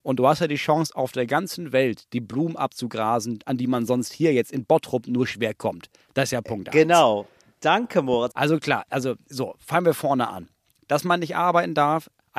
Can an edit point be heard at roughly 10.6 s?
no; 1 cut; at 8.3 s

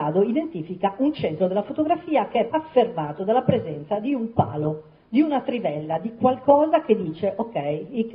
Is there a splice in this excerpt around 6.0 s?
no; 1 cut; at 2.5 s

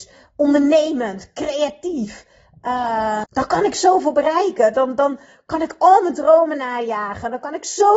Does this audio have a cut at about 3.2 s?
yes; 1 cut; at 3.2 s

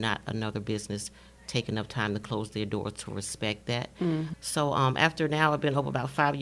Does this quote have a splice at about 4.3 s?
yes; 1 cut; at 4.3 s

